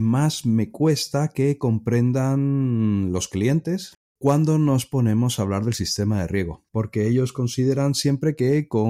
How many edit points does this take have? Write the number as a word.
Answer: two